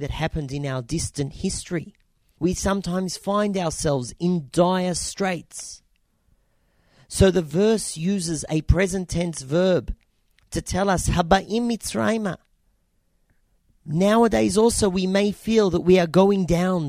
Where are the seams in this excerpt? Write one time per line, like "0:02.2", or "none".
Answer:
0:02.4